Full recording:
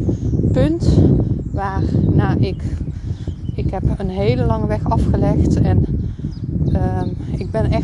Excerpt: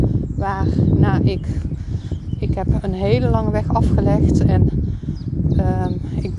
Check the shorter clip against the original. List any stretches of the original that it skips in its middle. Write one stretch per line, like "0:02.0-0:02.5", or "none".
none

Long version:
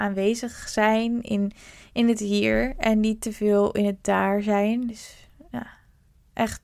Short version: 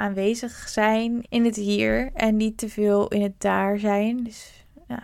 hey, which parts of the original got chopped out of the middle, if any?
0:01.2-0:01.9

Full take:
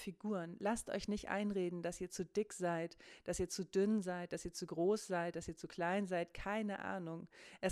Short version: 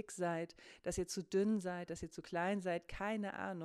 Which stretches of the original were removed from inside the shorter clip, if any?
0:04.3-0:05.3

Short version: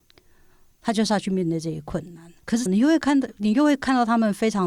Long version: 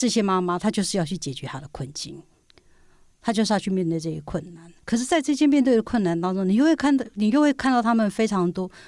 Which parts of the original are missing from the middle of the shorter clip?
0:05.1-0:06.4

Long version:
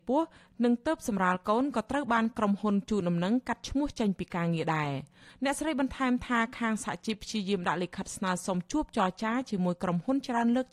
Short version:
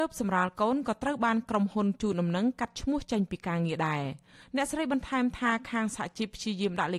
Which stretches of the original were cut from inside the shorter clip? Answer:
none

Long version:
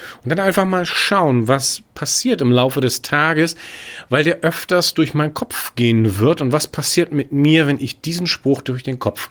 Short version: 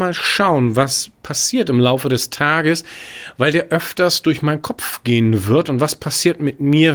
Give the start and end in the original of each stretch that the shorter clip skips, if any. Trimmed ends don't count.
none

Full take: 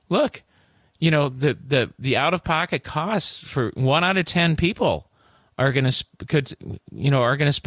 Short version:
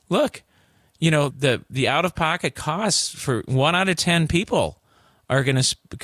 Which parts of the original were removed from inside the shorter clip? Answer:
0:01.3-0:01.6

